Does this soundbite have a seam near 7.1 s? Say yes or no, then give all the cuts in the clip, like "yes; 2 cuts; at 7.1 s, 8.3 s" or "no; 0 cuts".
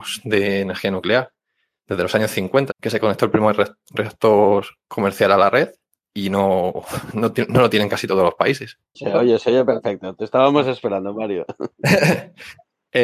no; 2 cuts; at 2.7 s, 8.9 s